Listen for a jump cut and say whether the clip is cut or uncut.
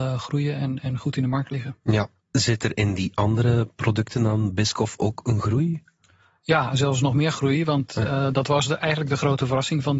uncut